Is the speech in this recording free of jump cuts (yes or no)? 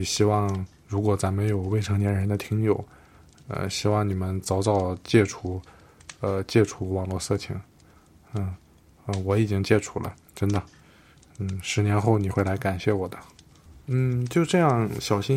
yes